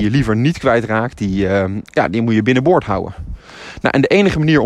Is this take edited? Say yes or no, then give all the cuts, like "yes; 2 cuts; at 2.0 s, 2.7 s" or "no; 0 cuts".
no; 0 cuts